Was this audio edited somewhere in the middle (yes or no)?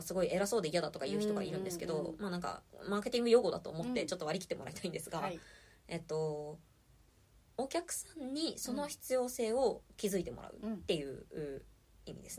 no